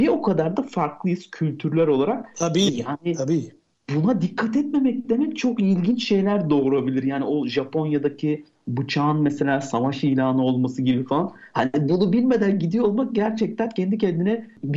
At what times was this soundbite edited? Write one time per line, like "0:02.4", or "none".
0:02.7